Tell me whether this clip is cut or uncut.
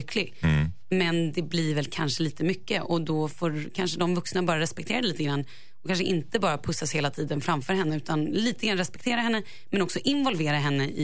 uncut